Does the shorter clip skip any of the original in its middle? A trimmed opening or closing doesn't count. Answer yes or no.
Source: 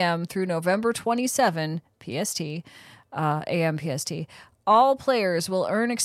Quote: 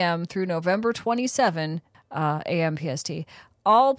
yes